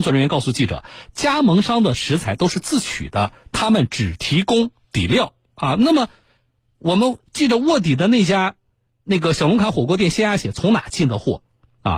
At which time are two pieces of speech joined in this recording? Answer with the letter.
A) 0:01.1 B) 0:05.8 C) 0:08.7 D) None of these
D